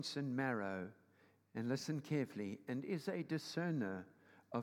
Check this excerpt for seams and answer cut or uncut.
uncut